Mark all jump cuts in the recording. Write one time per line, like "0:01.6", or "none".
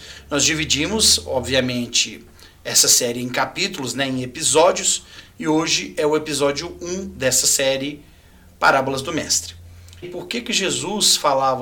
0:10.0